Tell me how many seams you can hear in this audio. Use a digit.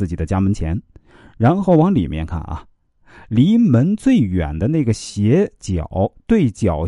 0